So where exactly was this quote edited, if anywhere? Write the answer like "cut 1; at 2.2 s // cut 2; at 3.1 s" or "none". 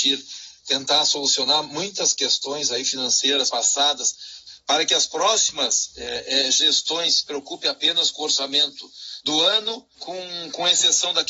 cut 1; at 9.9 s